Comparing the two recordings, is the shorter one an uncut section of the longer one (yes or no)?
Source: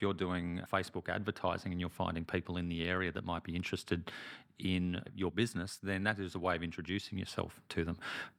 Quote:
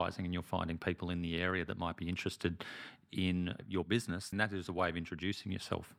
no